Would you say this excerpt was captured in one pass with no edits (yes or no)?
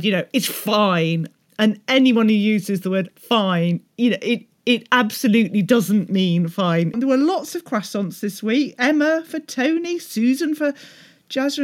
no